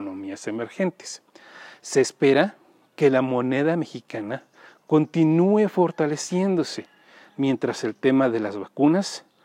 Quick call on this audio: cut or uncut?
uncut